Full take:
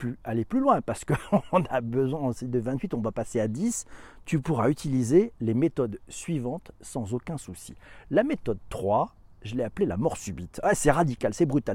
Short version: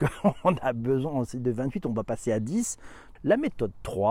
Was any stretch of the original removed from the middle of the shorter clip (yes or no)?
yes